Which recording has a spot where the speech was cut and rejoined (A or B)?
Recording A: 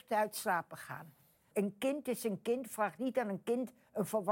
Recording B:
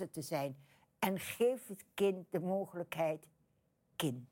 A